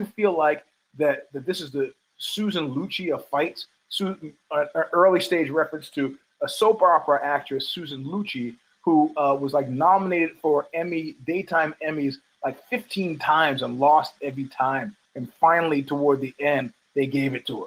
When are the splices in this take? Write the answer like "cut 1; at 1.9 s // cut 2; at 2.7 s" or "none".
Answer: none